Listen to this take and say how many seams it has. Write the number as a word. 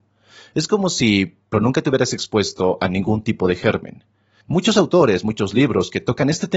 two